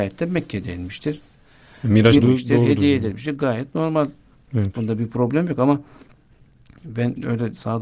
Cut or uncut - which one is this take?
cut